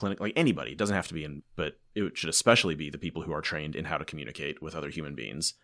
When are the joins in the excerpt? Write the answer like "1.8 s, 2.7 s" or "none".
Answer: 1.4 s